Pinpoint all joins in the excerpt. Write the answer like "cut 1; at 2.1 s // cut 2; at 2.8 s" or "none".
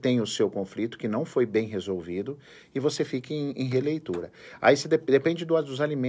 none